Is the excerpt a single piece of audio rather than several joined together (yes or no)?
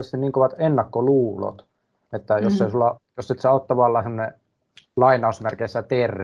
yes